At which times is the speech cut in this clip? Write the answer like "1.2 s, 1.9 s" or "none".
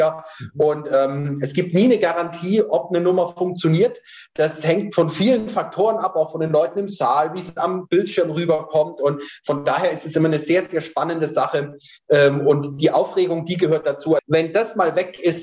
14.2 s